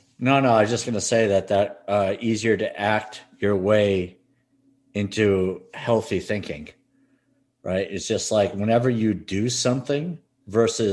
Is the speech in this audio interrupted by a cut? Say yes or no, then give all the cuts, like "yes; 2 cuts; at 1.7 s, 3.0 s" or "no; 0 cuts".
no; 0 cuts